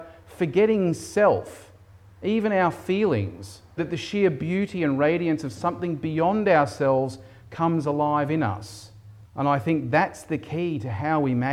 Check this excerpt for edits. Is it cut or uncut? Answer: cut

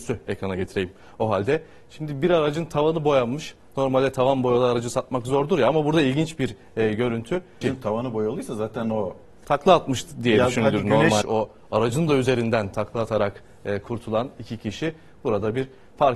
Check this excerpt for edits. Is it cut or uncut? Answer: cut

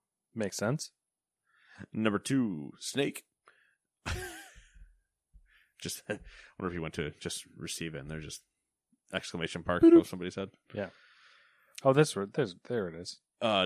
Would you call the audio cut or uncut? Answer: uncut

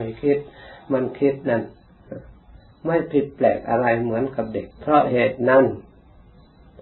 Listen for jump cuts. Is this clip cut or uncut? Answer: cut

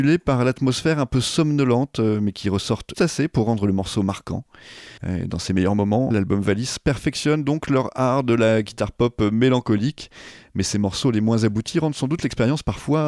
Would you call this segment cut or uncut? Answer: cut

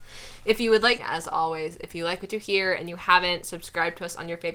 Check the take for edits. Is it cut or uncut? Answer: cut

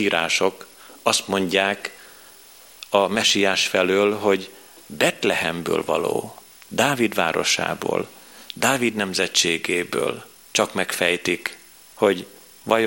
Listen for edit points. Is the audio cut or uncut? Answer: cut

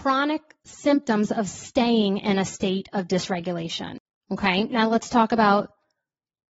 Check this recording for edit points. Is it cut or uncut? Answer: uncut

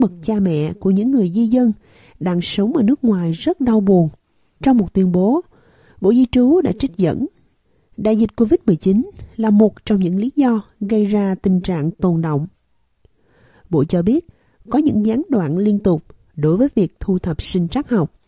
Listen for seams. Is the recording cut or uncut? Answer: cut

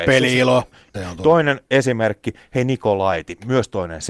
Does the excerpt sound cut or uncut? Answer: cut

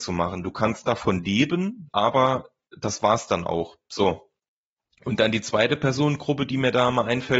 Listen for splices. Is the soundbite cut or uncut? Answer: cut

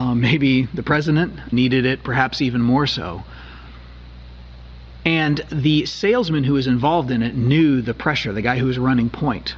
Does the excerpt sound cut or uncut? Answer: cut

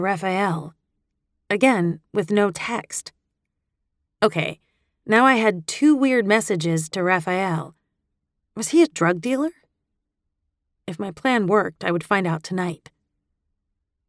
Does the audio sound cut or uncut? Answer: uncut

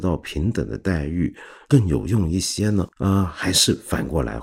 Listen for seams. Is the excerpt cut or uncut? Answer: cut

